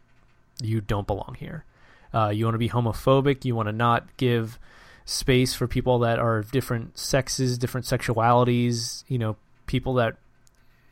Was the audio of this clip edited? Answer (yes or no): no